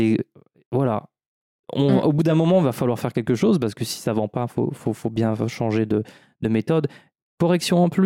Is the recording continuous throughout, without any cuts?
yes; 0 cuts

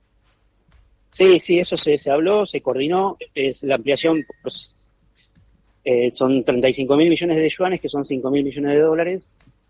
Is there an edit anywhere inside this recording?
no; 0 cuts

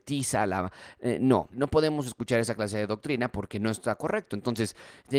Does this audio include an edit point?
yes; 1 cut; at 1.5 s

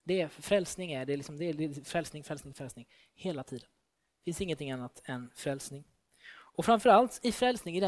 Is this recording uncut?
no; 1 cut; at 2.5 s

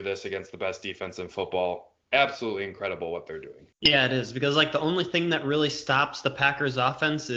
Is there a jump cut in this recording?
yes; 1 cut; at 3.7 s

